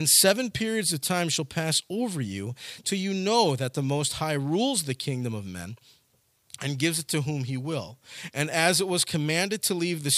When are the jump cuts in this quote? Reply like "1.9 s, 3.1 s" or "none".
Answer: none